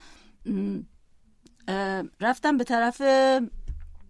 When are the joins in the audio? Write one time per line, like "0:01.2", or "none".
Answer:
0:02.1